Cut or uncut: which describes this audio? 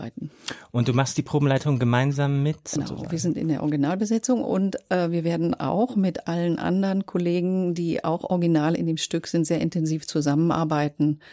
cut